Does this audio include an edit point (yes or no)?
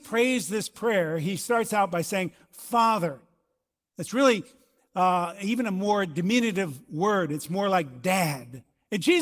no